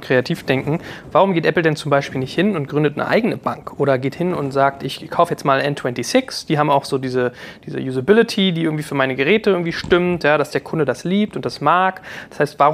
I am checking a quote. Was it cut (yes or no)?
no